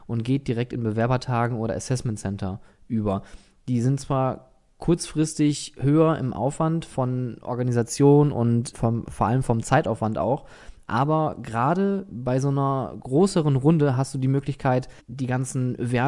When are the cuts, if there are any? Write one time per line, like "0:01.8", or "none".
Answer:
0:08.7
0:15.0